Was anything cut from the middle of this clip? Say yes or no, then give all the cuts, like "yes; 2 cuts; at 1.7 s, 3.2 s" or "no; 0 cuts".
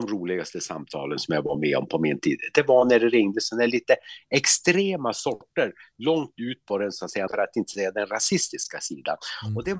yes; 1 cut; at 7.3 s